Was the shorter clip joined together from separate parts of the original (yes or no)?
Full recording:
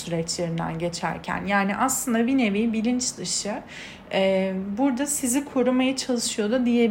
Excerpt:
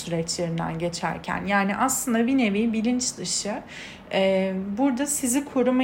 no